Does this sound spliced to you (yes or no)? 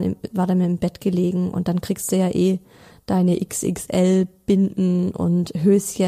no